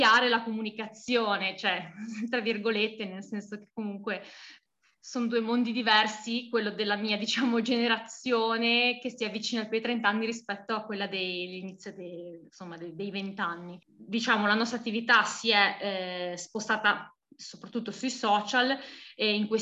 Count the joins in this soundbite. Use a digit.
0